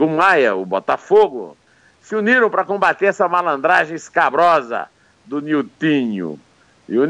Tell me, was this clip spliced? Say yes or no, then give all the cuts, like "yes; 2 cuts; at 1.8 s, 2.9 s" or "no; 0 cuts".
no; 0 cuts